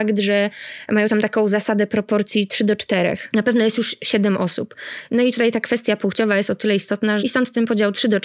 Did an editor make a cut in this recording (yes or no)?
yes